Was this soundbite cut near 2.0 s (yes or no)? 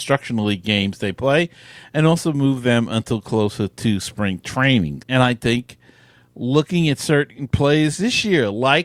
no